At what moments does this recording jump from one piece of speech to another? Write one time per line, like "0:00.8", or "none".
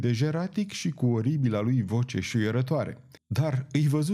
0:03.2